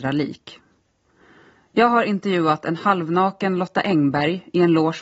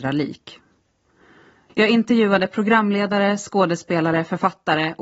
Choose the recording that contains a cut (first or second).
second